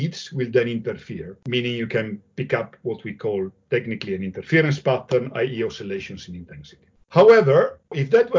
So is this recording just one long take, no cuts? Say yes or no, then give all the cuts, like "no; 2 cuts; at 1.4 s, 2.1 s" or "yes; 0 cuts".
yes; 0 cuts